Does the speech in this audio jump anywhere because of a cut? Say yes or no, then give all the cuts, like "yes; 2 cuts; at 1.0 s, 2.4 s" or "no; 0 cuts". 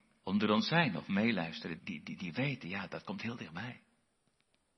yes; 1 cut; at 1.8 s